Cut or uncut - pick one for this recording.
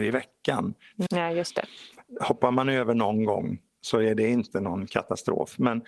cut